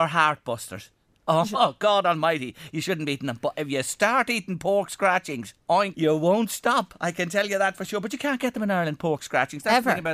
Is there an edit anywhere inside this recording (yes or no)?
yes